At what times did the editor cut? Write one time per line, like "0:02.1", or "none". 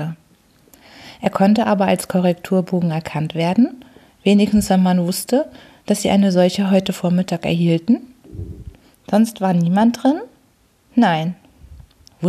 0:08.9